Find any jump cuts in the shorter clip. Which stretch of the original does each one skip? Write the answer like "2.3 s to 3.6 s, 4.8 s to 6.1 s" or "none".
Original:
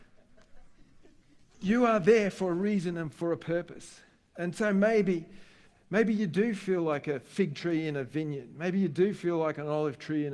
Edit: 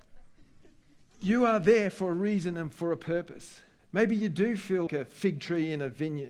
4.2 s to 5.8 s, 6.8 s to 7.0 s